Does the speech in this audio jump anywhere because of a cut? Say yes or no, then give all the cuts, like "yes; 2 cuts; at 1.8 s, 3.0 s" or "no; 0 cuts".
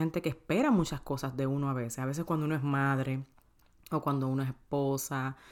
no; 0 cuts